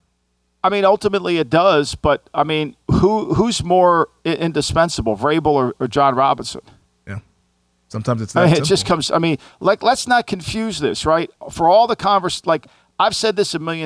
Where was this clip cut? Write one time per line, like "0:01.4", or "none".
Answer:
none